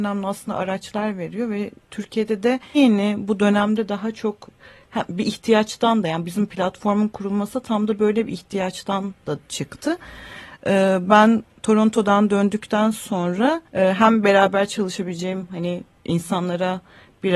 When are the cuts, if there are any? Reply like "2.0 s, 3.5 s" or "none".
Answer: 2.7 s, 13.7 s